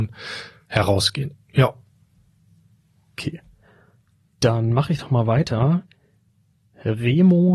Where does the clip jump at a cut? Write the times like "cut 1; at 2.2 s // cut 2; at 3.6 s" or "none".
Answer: none

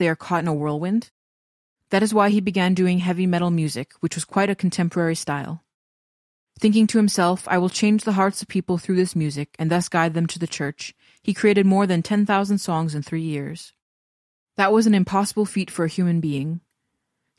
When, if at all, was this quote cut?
none

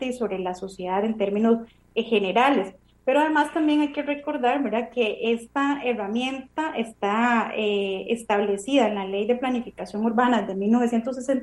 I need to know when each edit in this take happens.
none

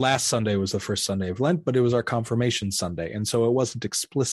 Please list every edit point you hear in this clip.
none

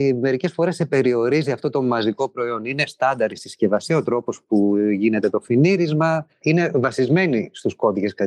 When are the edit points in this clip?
cut 1; at 6.4 s

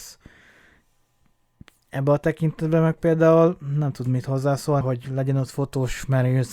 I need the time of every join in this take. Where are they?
cut 1; at 1.8 s // cut 2; at 4.8 s

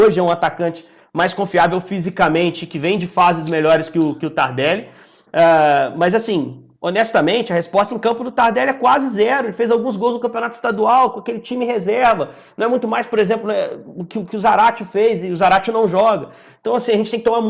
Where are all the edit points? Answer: none

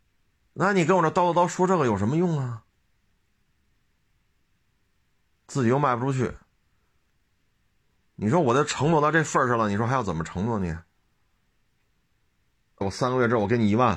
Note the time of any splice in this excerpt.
cut 1; at 12.8 s

